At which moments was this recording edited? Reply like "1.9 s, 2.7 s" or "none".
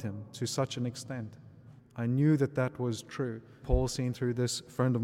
1.8 s, 3.6 s